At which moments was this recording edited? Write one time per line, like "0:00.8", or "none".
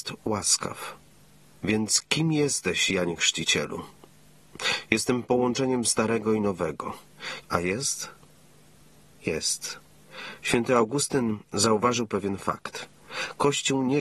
0:01.4
0:07.4